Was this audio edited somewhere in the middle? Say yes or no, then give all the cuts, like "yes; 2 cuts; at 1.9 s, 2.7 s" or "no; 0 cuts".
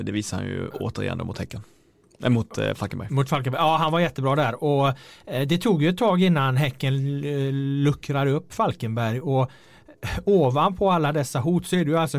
no; 0 cuts